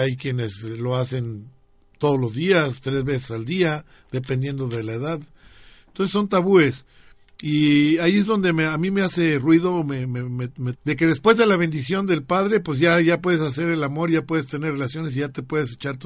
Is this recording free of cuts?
no; 1 cut; at 10.7 s

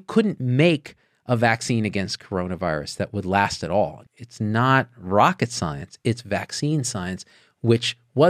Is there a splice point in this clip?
yes; 1 cut; at 4.0 s

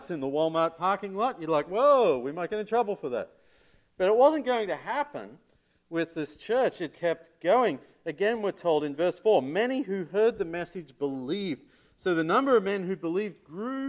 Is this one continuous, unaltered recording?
no; 1 cut; at 6.9 s

